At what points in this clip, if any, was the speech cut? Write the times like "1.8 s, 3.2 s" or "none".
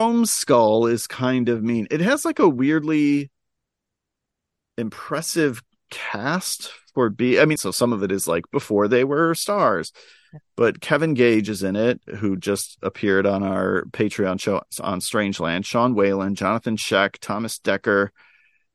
7.6 s